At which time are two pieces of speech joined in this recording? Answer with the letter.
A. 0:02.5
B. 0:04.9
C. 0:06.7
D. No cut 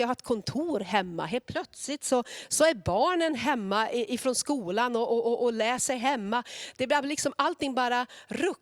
D